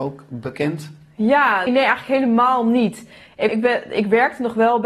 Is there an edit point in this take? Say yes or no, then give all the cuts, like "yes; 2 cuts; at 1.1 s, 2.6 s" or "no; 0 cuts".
yes; 2 cuts; at 1.7 s, 3.5 s